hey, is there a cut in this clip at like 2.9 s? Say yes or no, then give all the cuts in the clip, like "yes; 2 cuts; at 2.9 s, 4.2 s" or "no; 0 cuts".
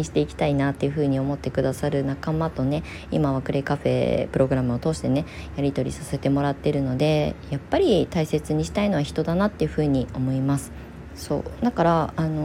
no; 1 cut; at 11.1 s